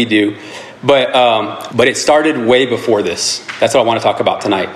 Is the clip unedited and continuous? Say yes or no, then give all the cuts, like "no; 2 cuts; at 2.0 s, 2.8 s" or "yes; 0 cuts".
no; 1 cut; at 1.7 s